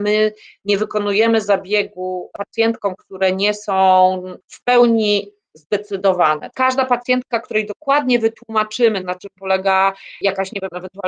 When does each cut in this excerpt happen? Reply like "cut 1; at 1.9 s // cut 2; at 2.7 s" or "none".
cut 1; at 6.5 s // cut 2; at 9.0 s